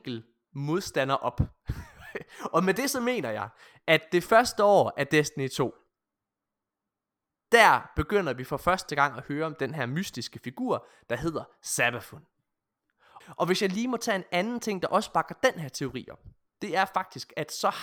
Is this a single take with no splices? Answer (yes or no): no